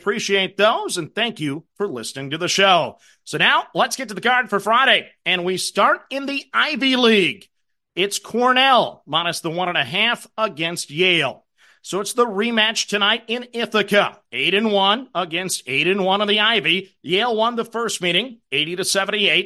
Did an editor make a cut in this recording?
yes; 1 cut; at 17.0 s

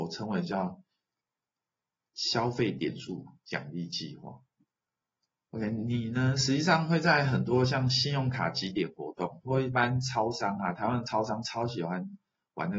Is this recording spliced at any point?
no; 0 cuts

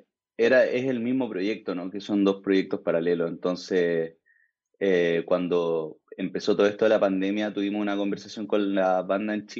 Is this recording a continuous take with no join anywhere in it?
yes; 0 cuts

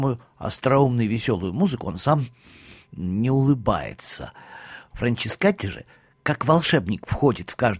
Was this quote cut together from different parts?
yes; 1 cut; at 4.9 s

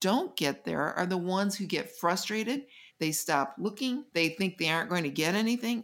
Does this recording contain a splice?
yes; 2 cuts; at 2.9 s, 4.1 s

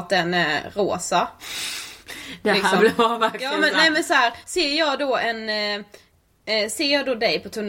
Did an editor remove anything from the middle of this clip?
no; 0 cuts

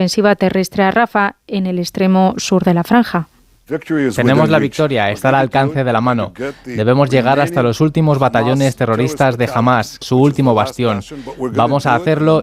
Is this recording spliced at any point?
yes; 1 cut; at 10.0 s

